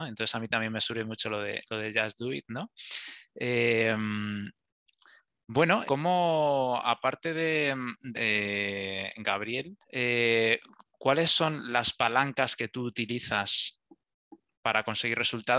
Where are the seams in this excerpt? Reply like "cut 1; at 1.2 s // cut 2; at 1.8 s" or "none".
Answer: cut 1; at 5.9 s // cut 2; at 8.1 s // cut 3; at 9.8 s